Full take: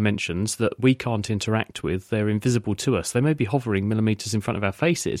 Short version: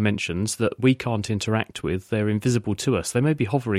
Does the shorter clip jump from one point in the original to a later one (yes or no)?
no